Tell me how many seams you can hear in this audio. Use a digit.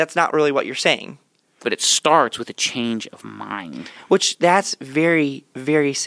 1